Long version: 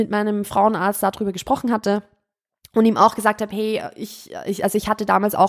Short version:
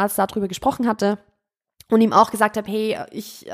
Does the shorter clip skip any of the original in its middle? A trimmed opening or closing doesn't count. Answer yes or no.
no